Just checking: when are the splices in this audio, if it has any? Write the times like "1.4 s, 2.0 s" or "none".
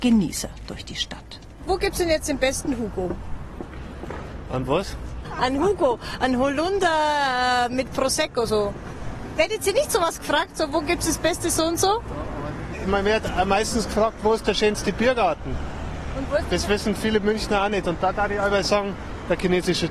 none